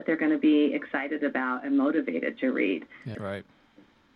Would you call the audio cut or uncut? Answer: cut